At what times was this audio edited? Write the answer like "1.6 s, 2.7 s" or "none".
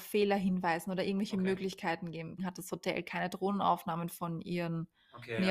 2.4 s